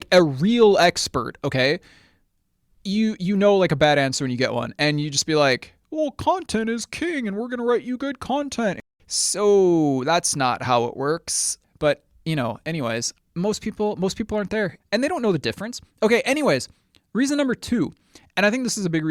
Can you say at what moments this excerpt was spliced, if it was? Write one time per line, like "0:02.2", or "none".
0:14.8